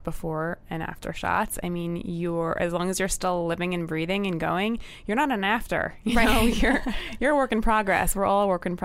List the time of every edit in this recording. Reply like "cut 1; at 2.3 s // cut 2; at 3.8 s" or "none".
none